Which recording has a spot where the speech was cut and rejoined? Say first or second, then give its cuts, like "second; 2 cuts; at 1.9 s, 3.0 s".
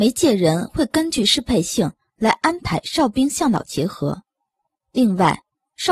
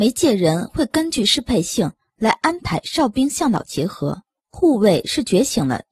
second; 1 cut; at 4.4 s